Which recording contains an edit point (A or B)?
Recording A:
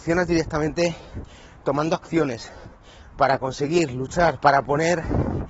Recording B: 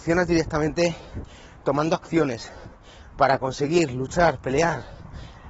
A